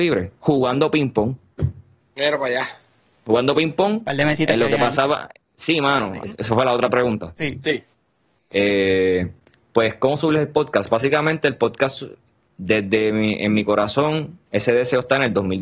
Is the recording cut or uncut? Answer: cut